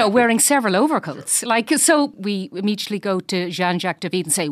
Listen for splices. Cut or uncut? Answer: uncut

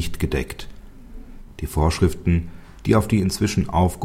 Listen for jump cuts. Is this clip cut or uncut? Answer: cut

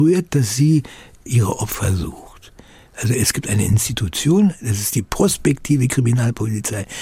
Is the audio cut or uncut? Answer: uncut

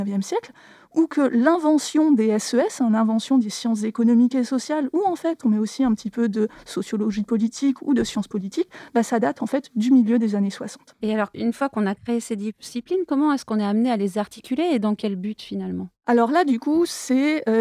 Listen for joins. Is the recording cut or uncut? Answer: uncut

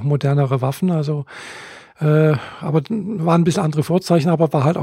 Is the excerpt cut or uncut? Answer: uncut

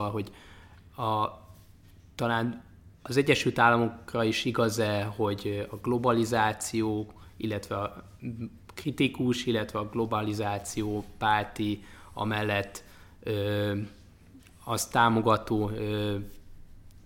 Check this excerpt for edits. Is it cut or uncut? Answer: uncut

